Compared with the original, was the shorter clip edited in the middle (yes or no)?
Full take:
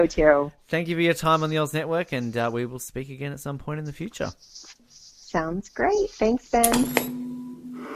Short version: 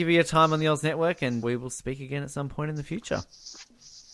yes